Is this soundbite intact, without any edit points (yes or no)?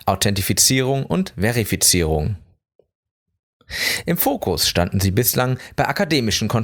yes